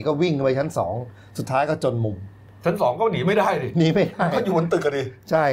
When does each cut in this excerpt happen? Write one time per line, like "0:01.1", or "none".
none